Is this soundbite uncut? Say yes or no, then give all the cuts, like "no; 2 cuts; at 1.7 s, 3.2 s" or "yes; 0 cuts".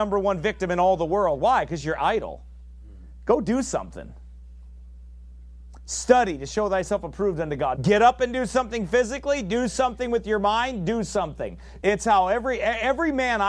no; 2 cuts; at 7.8 s, 11.8 s